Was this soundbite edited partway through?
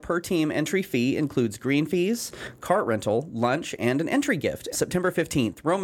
yes; 1 cut; at 4.7 s

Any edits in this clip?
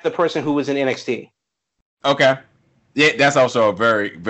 no; 0 cuts

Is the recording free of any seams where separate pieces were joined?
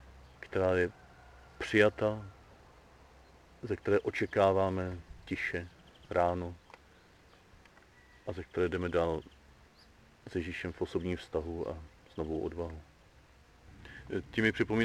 yes; 0 cuts

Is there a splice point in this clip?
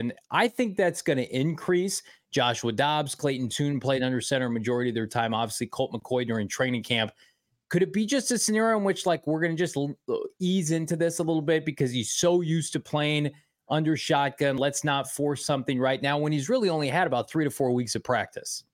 no; 0 cuts

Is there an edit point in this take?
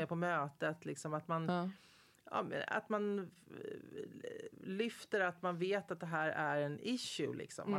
no; 0 cuts

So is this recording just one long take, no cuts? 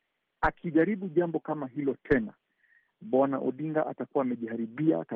yes; 0 cuts

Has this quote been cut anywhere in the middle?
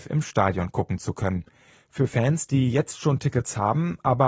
no; 0 cuts

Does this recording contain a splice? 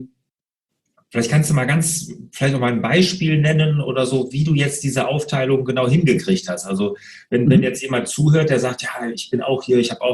no; 0 cuts

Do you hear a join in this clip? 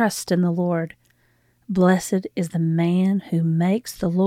no; 0 cuts

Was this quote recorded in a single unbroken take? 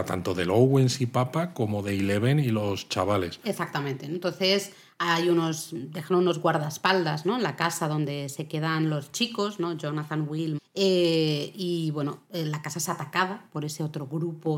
no; 1 cut; at 10.6 s

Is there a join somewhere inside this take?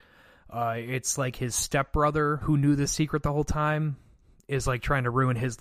yes; 1 cut; at 2.4 s

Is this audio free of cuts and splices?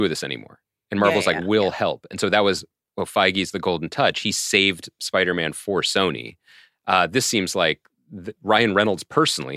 yes; 0 cuts

